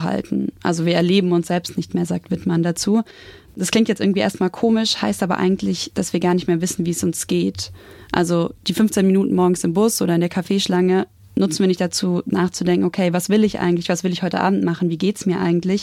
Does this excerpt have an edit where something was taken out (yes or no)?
no